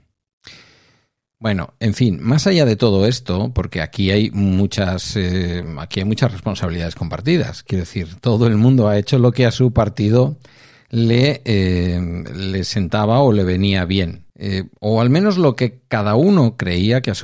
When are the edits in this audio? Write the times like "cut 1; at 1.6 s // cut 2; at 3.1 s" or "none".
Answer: cut 1; at 14.3 s